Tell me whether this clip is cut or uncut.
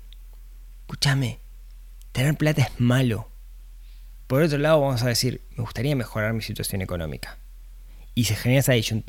uncut